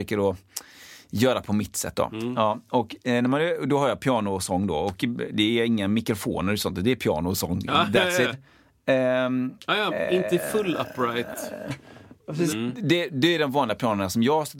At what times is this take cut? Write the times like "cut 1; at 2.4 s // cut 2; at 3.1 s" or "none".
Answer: cut 1; at 8.3 s // cut 2; at 9.9 s // cut 3; at 12.5 s